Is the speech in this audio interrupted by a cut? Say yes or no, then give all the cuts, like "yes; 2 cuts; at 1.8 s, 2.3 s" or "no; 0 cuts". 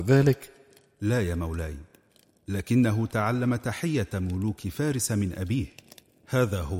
no; 0 cuts